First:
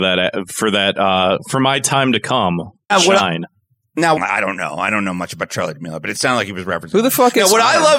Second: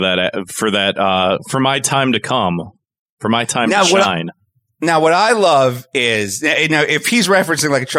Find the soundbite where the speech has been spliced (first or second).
first